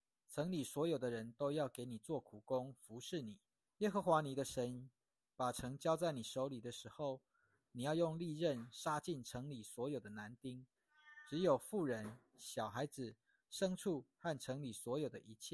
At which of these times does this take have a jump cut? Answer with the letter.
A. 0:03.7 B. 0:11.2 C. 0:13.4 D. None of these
A